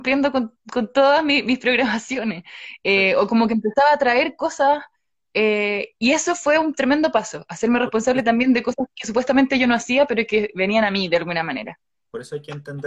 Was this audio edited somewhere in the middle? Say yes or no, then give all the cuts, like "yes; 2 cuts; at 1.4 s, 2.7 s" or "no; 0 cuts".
no; 0 cuts